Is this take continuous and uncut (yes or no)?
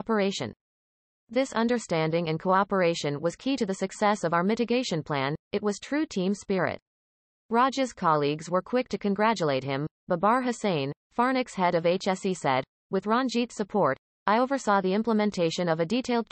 yes